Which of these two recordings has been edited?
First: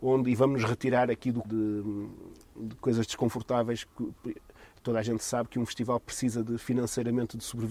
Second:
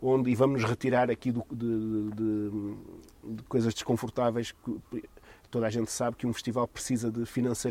first; 1 cut; at 1.4 s

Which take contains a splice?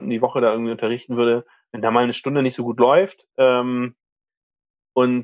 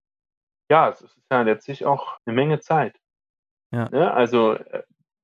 second; 2 cuts; at 2.2 s, 3.9 s

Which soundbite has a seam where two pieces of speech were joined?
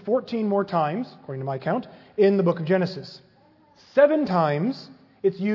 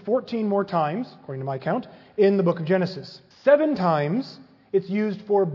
second; 1 cut; at 3.3 s

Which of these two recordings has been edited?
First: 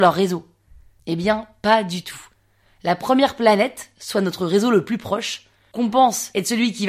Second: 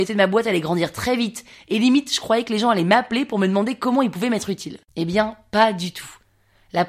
second; 1 cut; at 4.9 s

